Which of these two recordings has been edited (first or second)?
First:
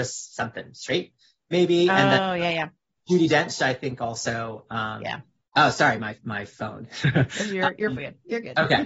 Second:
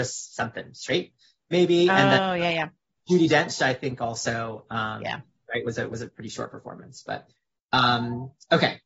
first